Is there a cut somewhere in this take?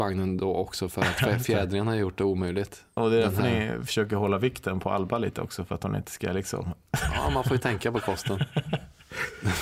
no; 0 cuts

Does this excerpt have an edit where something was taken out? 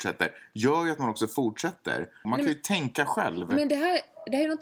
yes; 1 cut; at 2.2 s

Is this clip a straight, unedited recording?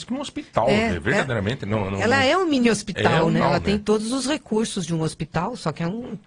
no; 1 cut; at 3.4 s

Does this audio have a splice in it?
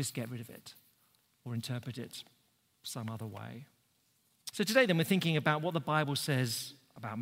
yes; 1 cut; at 4.5 s

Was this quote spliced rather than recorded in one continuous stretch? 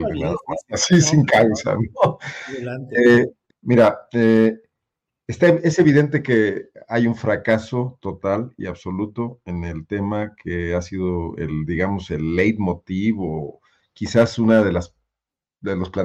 yes; 1 cut; at 3.5 s

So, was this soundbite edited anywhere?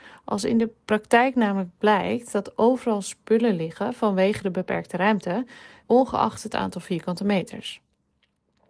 yes; 1 cut; at 5.8 s

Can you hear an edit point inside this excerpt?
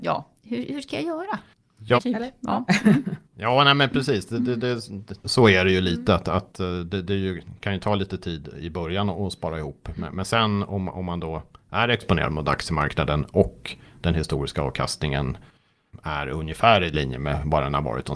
yes; 1 cut; at 2.0 s

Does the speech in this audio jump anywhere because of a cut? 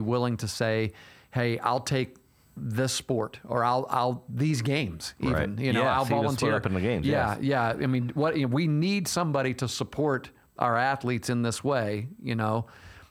no; 0 cuts

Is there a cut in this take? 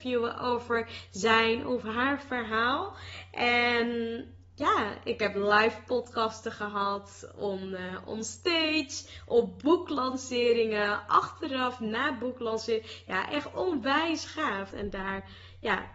yes; 1 cut; at 14.7 s

